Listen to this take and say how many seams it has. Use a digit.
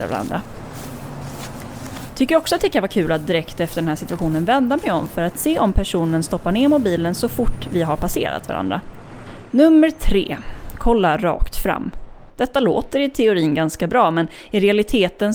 2